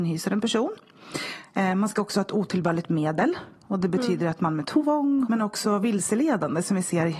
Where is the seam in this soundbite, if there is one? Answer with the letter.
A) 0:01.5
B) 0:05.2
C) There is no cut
B